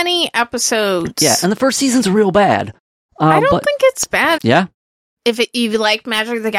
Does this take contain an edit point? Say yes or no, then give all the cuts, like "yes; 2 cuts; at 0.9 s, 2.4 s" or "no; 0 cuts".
yes; 1 cut; at 4.4 s